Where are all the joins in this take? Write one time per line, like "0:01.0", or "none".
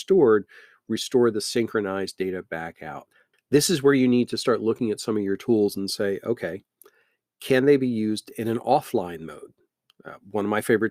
0:03.3